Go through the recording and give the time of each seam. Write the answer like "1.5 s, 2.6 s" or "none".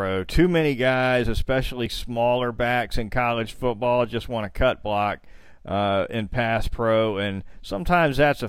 none